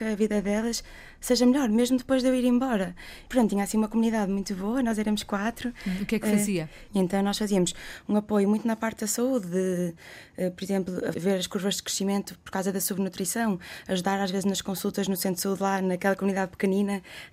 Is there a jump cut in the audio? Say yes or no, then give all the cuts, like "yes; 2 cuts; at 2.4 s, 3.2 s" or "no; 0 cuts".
yes; 1 cut; at 11.1 s